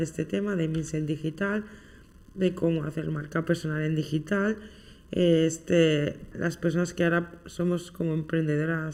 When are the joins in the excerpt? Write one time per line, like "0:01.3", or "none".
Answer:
0:06.3